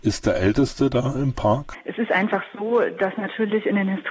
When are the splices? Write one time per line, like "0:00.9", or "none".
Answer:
none